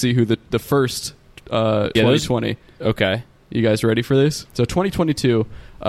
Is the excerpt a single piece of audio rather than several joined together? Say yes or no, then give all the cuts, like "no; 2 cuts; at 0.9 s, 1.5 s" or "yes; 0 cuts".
no; 2 cuts; at 2.0 s, 4.5 s